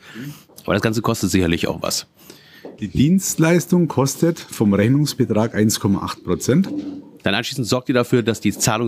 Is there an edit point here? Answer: yes; 2 cuts; at 2.8 s, 7.2 s

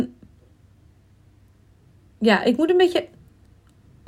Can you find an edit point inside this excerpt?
no; 0 cuts

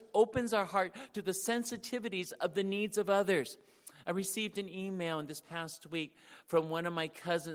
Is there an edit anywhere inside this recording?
no; 0 cuts

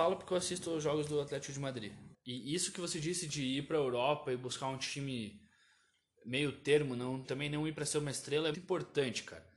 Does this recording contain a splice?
yes; 3 cuts; at 2.1 s, 7.2 s, 8.5 s

